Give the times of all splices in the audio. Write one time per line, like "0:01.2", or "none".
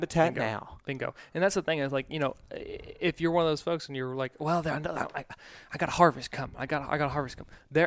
none